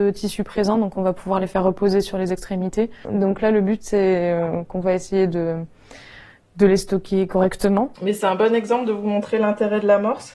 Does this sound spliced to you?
yes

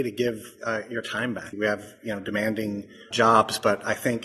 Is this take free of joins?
no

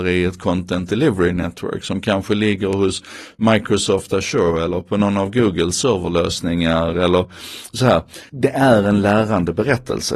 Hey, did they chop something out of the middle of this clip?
yes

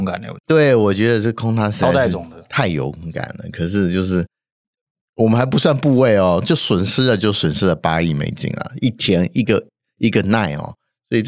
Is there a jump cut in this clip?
no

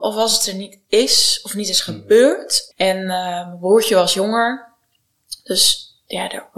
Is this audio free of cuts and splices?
no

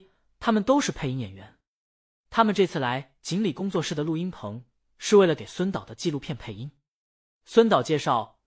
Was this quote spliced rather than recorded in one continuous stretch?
no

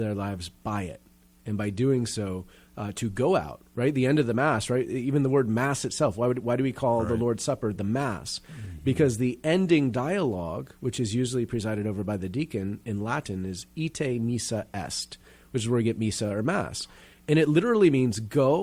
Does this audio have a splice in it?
no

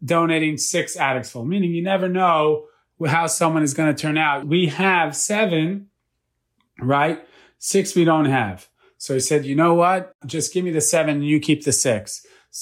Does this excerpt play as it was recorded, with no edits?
no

